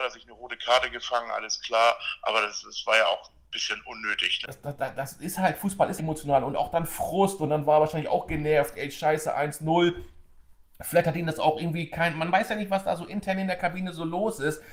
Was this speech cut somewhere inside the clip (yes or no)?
yes